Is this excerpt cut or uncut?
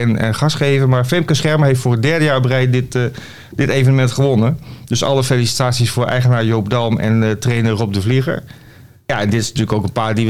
uncut